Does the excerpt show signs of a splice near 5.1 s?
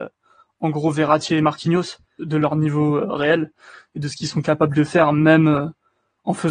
no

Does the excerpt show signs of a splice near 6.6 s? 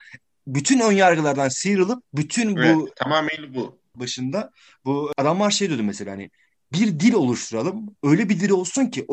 no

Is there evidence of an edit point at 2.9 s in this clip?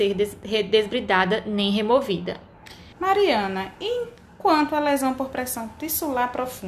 yes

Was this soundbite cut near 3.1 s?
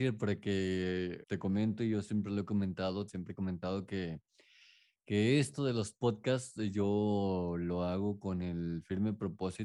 yes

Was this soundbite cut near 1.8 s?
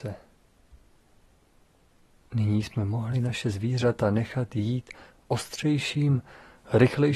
no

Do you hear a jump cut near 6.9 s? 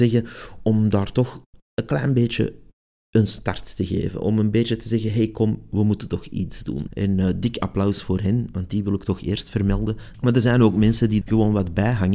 yes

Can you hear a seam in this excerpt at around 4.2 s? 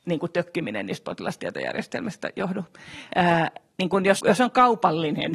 yes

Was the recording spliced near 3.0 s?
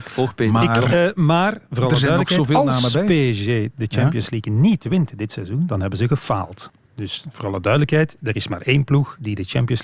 no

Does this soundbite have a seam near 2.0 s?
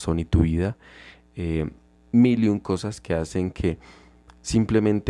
yes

